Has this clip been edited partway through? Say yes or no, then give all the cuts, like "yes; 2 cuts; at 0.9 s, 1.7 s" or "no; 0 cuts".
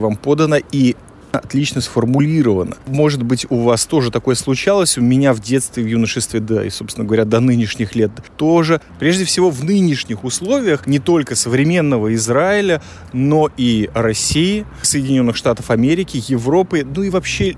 yes; 1 cut; at 8.9 s